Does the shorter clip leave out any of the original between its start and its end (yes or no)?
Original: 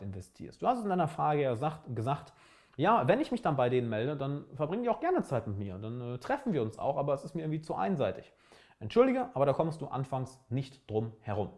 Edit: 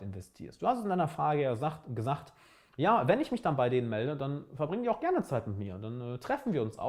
no